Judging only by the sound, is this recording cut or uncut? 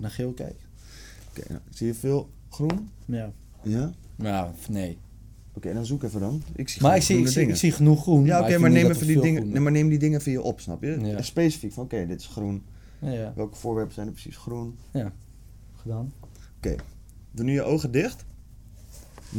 uncut